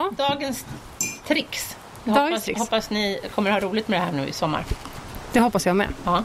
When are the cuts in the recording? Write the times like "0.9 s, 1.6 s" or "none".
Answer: none